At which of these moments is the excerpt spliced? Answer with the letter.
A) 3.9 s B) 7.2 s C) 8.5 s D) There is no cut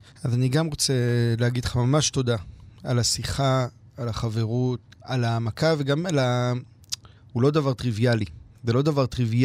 B